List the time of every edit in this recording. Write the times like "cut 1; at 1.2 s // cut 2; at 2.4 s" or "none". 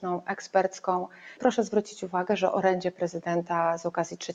cut 1; at 1.4 s